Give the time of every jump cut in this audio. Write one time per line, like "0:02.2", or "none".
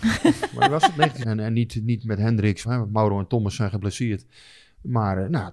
0:01.2
0:02.6